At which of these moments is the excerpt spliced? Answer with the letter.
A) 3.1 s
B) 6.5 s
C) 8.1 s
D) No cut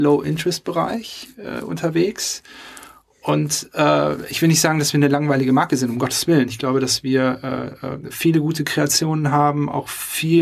D